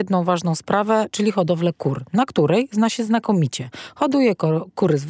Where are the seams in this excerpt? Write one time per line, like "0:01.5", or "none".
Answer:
none